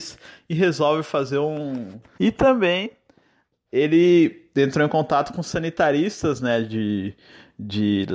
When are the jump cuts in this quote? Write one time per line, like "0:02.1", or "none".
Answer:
0:02.2